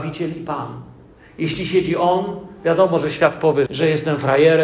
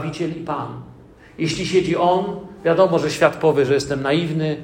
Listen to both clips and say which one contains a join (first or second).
first